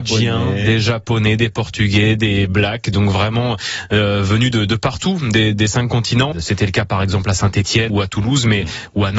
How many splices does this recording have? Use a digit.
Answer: 2